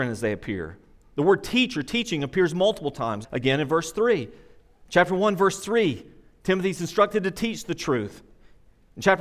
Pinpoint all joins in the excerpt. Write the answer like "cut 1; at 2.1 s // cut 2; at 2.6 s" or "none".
cut 1; at 3.2 s // cut 2; at 4.8 s